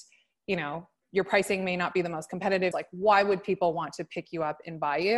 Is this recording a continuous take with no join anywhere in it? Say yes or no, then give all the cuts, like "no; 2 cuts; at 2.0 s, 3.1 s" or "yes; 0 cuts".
no; 2 cuts; at 1.0 s, 2.7 s